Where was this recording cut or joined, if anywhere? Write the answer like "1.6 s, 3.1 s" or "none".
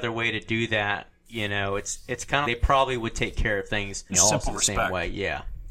2.4 s, 4.1 s